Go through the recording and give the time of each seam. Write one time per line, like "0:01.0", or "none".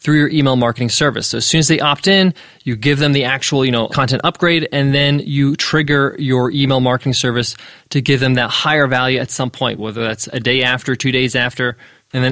none